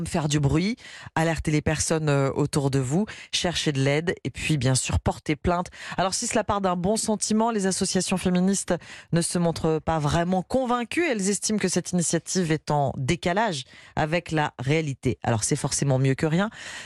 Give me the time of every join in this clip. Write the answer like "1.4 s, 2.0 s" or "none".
none